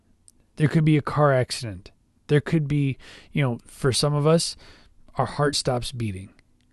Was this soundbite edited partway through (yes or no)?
yes